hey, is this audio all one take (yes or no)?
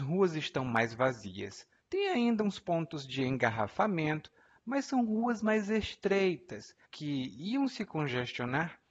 no